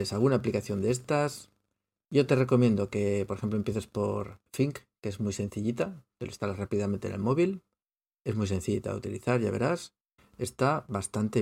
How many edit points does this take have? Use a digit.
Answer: 1